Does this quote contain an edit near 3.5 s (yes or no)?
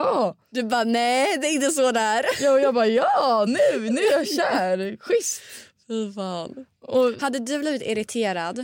no